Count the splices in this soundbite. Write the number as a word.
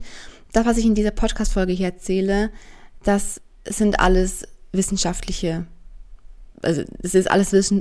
one